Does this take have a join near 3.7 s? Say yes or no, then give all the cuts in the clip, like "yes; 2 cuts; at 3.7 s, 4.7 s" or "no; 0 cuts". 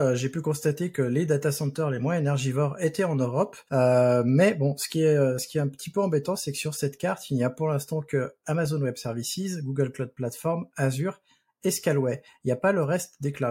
yes; 1 cut; at 3.7 s